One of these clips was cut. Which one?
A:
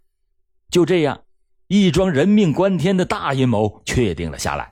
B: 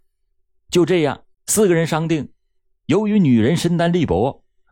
B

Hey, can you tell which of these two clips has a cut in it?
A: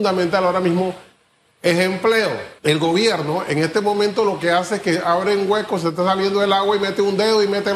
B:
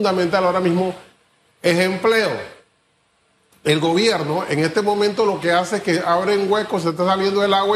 A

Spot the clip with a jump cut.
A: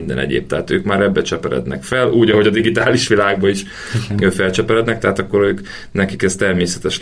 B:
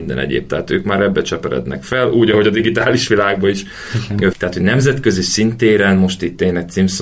B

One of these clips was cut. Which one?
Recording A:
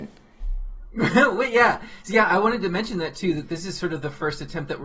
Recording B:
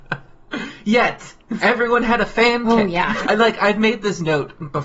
B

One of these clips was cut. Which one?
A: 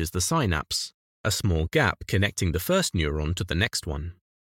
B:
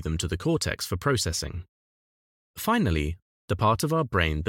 B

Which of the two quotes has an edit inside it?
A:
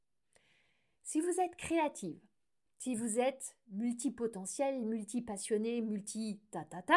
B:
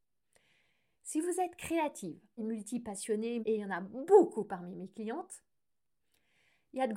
B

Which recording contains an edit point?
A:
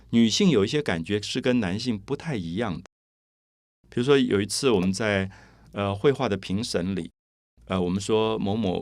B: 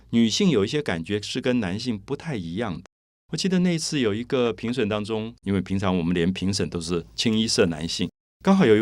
B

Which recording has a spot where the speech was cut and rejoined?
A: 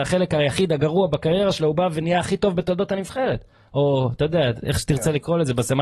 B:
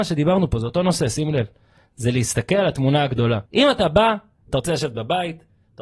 B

